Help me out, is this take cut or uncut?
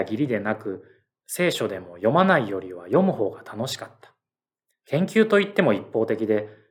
cut